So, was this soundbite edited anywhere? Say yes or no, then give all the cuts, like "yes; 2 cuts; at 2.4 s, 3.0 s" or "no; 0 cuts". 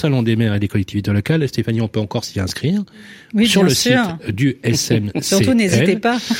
no; 0 cuts